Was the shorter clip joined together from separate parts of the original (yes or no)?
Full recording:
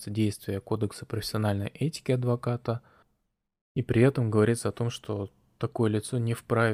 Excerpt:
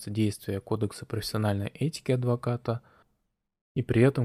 no